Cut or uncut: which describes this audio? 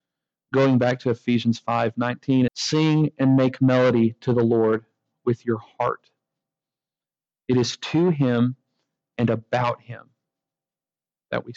cut